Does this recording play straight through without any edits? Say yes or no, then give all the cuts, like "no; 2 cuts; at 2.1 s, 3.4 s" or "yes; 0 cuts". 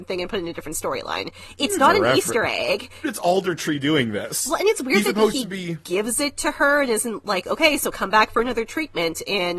no; 1 cut; at 3.0 s